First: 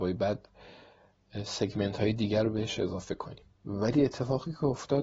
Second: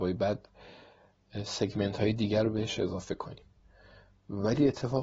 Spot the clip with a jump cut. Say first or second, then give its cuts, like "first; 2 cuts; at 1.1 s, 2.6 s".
first; 1 cut; at 3.5 s